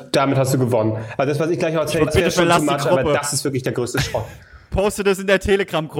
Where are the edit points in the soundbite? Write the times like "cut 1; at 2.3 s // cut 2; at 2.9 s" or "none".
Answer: cut 1; at 2.1 s